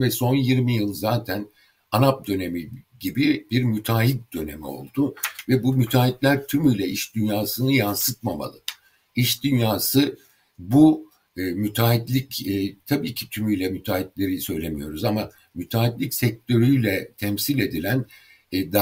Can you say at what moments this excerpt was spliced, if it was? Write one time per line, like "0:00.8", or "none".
0:12.8